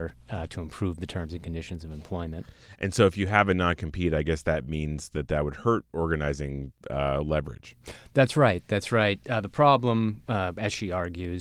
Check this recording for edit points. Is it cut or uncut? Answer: uncut